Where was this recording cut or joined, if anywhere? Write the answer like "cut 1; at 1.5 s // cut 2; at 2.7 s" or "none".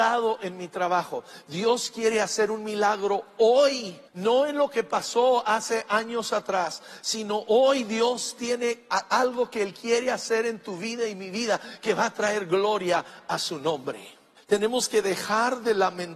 cut 1; at 4.1 s // cut 2; at 14.4 s